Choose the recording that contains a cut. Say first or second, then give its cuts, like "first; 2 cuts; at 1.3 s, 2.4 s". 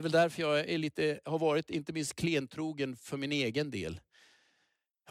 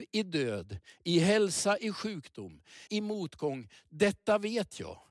second; 1 cut; at 2.9 s